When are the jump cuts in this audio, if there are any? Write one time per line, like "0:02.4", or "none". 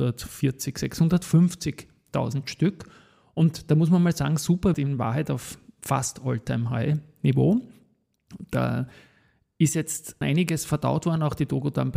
0:04.7
0:10.2